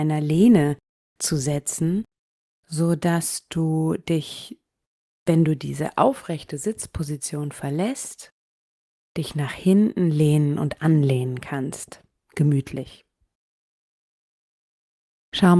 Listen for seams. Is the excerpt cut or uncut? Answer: uncut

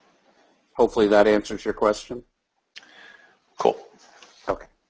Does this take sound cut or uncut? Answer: cut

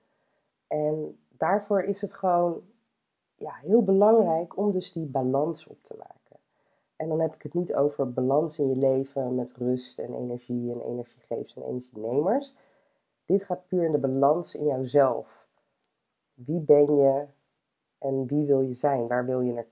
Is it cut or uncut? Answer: uncut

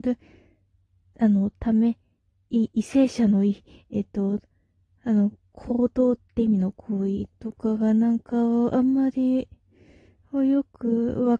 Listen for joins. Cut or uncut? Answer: uncut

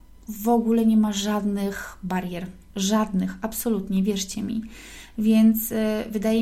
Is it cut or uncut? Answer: uncut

